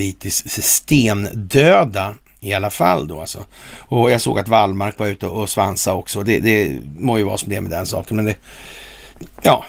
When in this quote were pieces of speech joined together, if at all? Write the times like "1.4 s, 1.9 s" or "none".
none